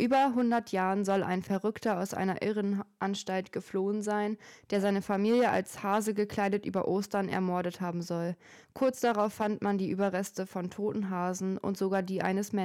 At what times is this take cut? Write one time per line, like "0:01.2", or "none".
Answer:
none